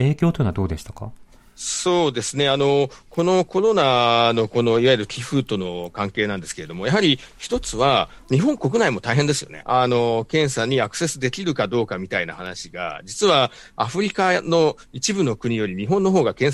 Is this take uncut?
no; 1 cut; at 9.6 s

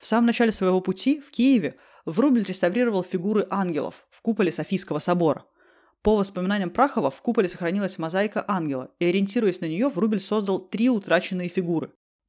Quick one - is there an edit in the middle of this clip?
no; 0 cuts

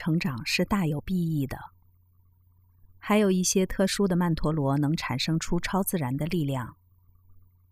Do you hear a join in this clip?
no; 0 cuts

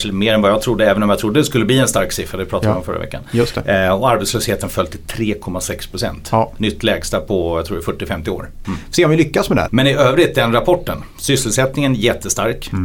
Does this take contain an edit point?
yes; 2 cuts; at 8.6 s, 9.7 s

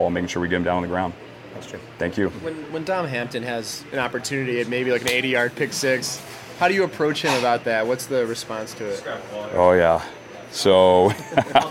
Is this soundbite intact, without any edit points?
yes; 0 cuts

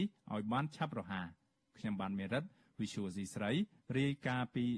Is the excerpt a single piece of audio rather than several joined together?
yes; 0 cuts

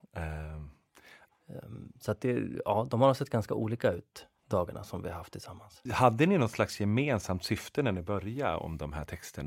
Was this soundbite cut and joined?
yes; 2 cuts; at 1.3 s, 5.9 s

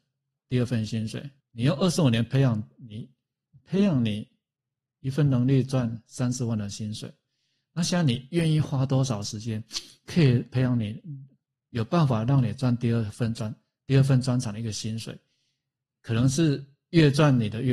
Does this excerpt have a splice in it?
yes; 1 cut; at 1.4 s

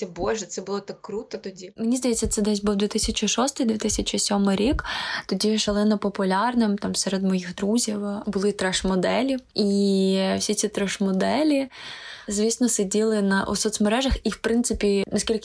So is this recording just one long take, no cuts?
yes; 0 cuts

